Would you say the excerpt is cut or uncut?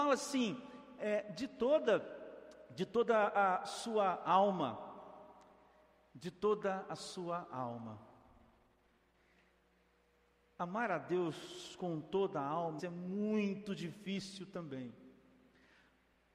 cut